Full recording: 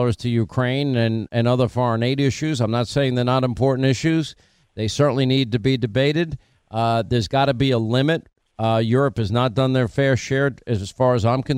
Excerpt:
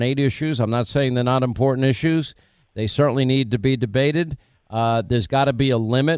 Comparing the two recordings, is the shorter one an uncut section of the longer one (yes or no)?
yes